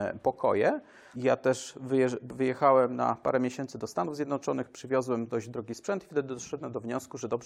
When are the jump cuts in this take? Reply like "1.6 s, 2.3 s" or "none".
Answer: 1.1 s